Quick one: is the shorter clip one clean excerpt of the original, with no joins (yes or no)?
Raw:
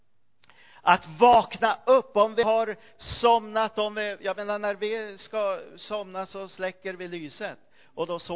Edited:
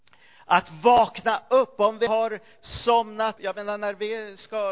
no